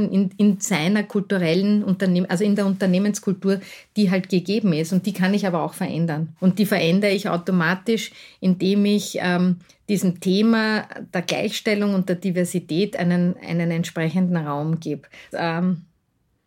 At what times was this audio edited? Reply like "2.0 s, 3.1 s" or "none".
6.4 s, 15.3 s

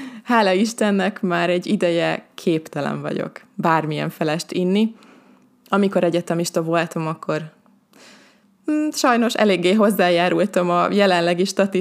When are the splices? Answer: none

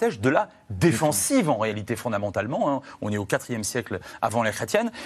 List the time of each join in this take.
none

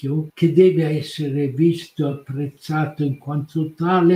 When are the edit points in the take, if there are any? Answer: none

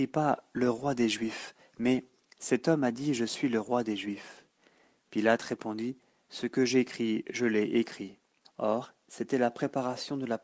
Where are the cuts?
8.4 s

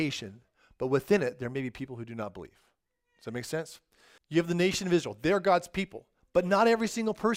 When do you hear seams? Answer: 4.2 s

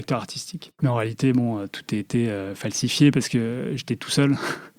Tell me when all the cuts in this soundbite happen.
none

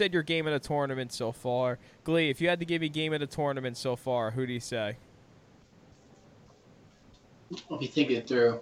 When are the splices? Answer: none

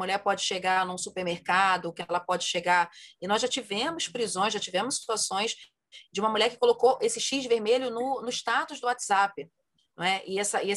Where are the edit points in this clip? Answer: none

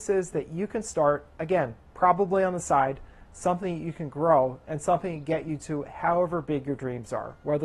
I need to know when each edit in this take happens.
none

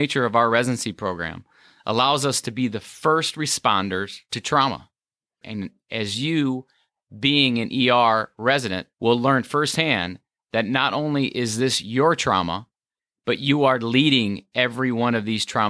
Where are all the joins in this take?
5.4 s, 8.9 s

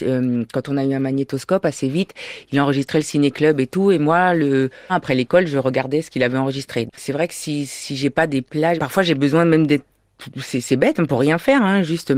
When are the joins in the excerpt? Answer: 4.9 s, 6.9 s, 8.8 s

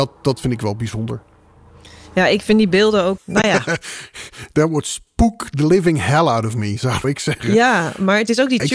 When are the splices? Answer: 3.2 s, 7.0 s

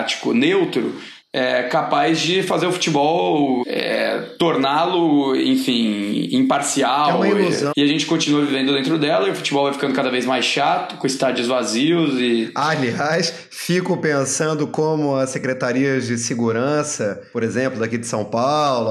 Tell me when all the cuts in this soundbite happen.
3.6 s, 7.7 s

